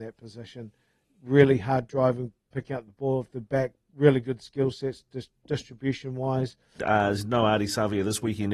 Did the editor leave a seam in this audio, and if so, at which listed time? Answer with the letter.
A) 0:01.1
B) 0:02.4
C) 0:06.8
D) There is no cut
C